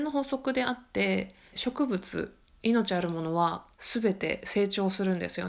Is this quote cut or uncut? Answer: cut